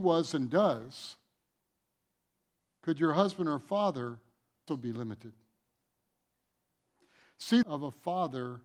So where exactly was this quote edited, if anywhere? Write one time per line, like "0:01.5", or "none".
0:04.7
0:07.6